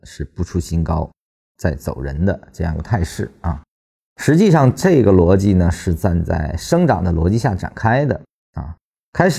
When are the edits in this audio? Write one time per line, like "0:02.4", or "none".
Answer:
0:04.0